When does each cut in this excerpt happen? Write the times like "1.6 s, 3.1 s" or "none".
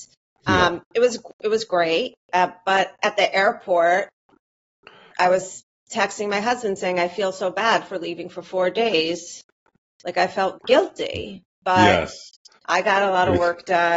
10.6 s, 12.6 s